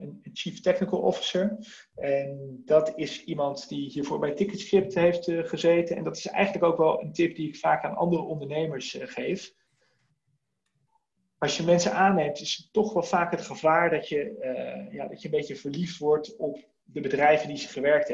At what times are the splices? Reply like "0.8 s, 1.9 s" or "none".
none